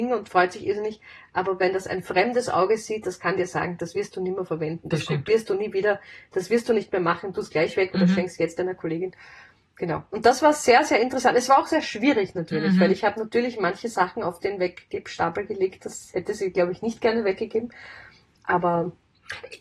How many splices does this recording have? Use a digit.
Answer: 0